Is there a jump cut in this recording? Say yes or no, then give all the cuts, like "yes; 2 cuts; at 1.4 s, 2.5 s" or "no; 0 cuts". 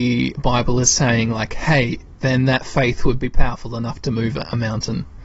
yes; 1 cut; at 2.2 s